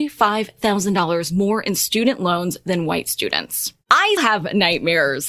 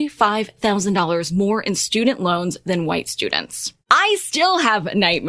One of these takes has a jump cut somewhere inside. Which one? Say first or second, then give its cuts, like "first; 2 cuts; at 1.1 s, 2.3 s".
first; 1 cut; at 4.2 s